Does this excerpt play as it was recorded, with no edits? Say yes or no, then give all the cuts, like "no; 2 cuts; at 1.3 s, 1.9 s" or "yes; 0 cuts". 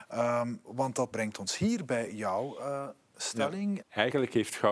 no; 2 cuts; at 1.1 s, 3.8 s